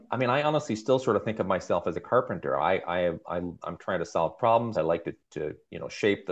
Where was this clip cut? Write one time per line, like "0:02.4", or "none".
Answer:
none